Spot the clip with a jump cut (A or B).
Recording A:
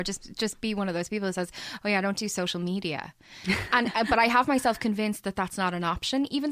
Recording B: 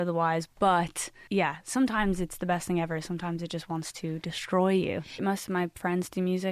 B